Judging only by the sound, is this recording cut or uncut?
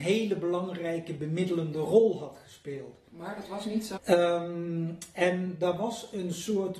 cut